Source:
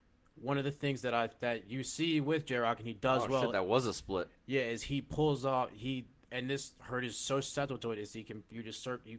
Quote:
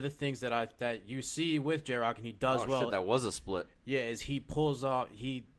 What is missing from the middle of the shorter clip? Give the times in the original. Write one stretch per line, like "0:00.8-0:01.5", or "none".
none